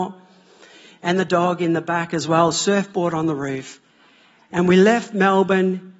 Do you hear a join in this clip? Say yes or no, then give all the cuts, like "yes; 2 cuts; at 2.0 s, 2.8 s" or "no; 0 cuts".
no; 0 cuts